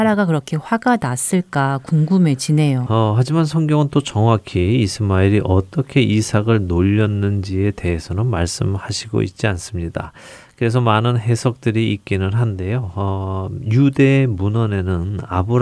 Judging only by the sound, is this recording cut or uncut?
cut